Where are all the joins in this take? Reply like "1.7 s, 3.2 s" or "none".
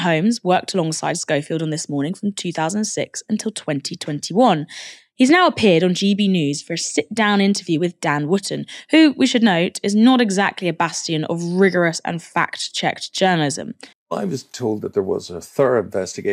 13.9 s